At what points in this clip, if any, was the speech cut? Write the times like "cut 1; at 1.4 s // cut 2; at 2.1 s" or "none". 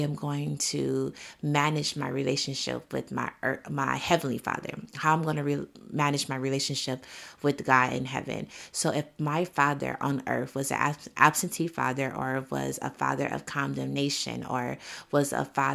none